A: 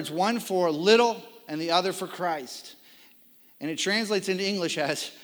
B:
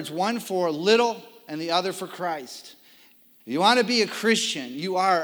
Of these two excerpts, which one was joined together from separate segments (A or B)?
B